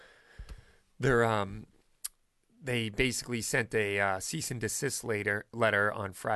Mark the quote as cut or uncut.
uncut